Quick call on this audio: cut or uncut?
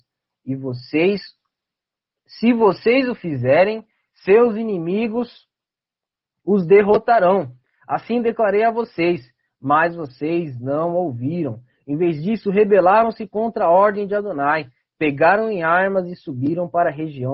uncut